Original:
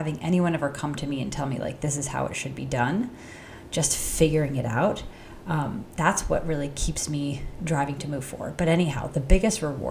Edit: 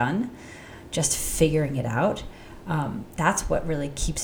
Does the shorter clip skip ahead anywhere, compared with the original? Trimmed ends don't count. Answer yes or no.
no